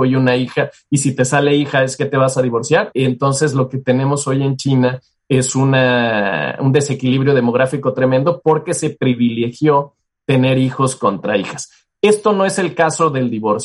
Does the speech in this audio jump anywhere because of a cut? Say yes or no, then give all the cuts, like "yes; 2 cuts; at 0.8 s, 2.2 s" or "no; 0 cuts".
yes; 1 cut; at 2.9 s